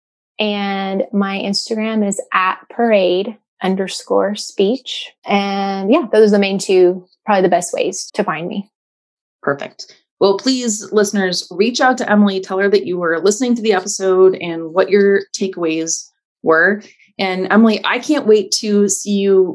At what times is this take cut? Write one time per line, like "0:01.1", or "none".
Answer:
0:05.2
0:08.1